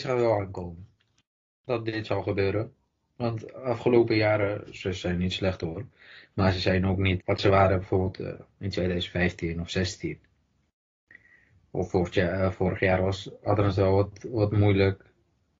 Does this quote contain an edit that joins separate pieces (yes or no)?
yes